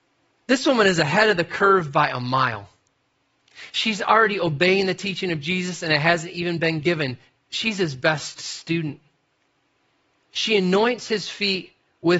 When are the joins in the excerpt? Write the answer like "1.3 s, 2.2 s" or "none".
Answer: 10.3 s